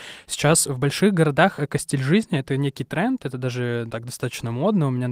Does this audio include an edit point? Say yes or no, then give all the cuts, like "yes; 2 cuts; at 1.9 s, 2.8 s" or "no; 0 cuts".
yes; 1 cut; at 3.9 s